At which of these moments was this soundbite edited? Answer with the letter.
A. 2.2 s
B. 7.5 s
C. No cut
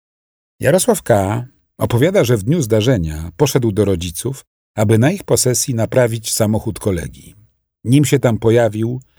C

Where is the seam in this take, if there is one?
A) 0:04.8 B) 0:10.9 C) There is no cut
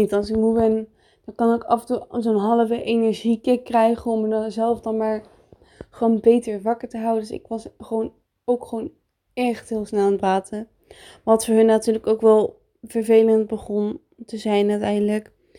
C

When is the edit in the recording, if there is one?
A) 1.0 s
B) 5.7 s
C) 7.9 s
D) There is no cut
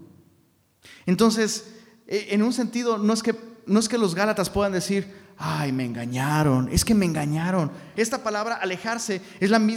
C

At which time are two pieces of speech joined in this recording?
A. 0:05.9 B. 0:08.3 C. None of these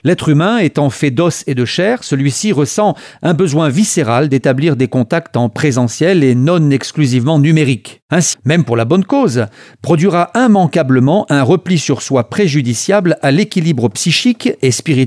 B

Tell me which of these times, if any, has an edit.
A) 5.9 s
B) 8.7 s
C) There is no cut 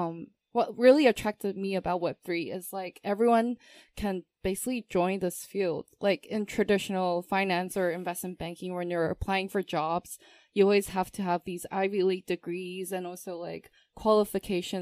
C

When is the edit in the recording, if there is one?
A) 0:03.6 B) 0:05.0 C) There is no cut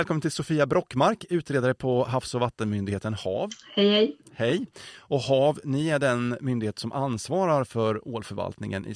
C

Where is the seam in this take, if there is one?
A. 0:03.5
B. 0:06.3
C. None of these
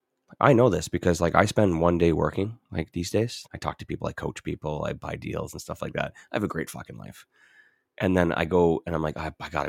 A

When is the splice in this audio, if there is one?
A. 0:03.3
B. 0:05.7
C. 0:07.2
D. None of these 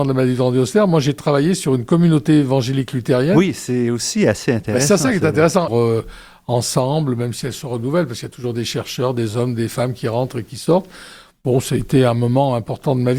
B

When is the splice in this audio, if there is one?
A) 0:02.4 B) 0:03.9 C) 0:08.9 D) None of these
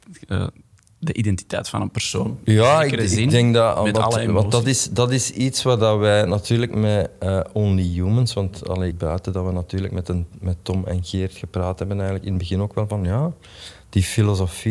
C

